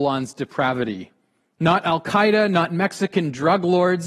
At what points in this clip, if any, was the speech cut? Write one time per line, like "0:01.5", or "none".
none